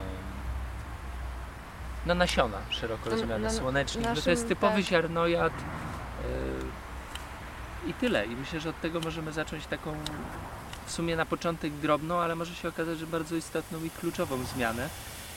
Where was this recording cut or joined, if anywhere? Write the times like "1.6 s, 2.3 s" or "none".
none